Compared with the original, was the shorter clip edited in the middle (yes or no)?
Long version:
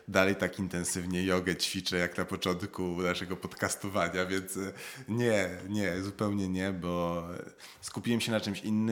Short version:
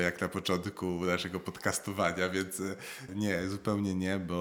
yes